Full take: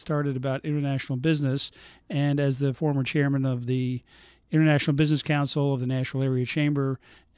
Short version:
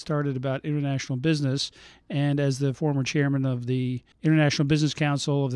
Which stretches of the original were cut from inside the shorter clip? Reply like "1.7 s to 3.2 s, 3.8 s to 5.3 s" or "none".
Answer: 4.1 s to 4.4 s